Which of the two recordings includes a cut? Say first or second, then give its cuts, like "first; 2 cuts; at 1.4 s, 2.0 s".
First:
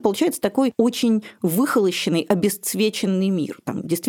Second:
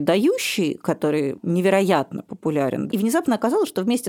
second; 1 cut; at 2.9 s